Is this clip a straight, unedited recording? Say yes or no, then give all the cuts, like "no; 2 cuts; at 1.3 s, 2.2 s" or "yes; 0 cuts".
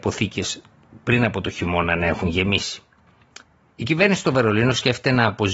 yes; 0 cuts